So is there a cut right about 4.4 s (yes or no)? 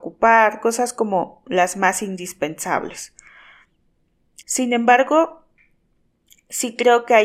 yes